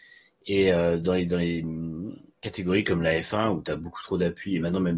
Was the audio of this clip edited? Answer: no; 0 cuts

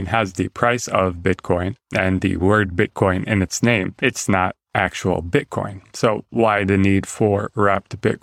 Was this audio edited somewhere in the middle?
no; 0 cuts

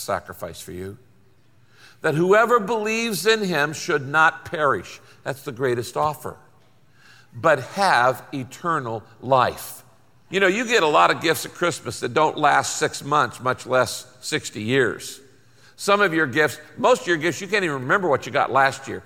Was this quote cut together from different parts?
yes; 1 cut; at 10.3 s

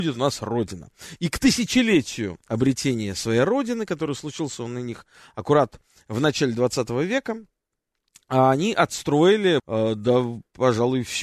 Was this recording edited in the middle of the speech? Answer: yes; 2 cuts; at 1.2 s, 9.6 s

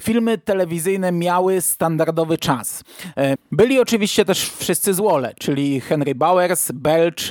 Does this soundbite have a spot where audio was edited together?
yes; 1 cut; at 3.3 s

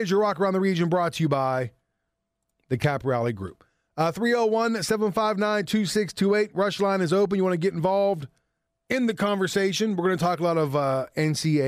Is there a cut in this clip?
no; 0 cuts

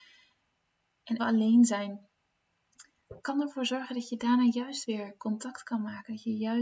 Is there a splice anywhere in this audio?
yes; 2 cuts; at 1.2 s, 3.2 s

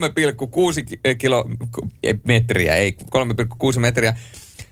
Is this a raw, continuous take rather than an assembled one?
no; 1 cut; at 3.1 s

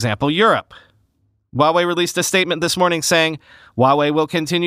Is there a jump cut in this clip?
no; 0 cuts

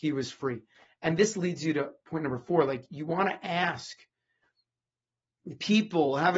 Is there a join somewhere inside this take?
no; 0 cuts

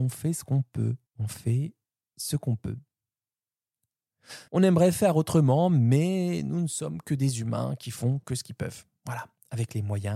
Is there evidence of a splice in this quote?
yes; 2 cuts; at 1.1 s, 4.5 s

